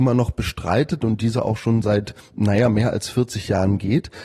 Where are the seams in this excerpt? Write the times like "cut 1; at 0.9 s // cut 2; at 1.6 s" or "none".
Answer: none

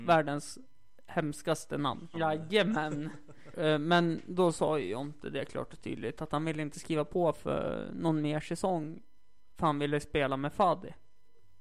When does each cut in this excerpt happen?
cut 1; at 2.1 s // cut 2; at 3.5 s

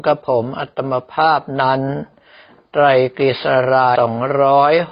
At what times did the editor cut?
cut 1; at 4.0 s

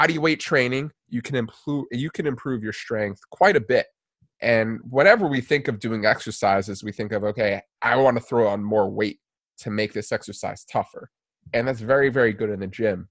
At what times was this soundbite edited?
cut 1; at 0.9 s

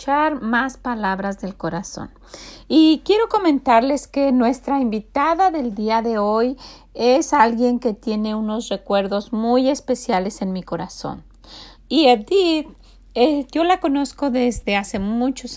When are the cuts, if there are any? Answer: cut 1; at 11.7 s

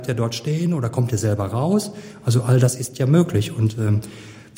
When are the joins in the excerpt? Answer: none

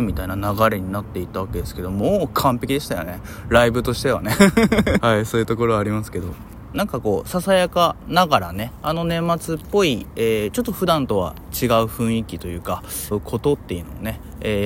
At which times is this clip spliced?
cut 1; at 5.0 s // cut 2; at 6.7 s // cut 3; at 13.1 s

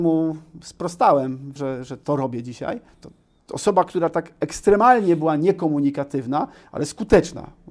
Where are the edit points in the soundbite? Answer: cut 1; at 1.6 s // cut 2; at 2.9 s

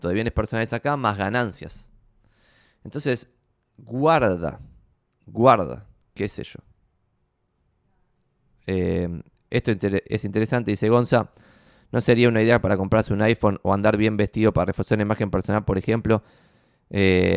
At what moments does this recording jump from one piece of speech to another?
cut 1; at 6.0 s

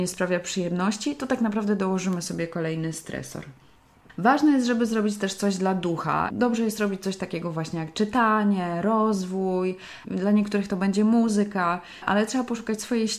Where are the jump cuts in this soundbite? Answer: cut 1; at 10.0 s // cut 2; at 12.0 s

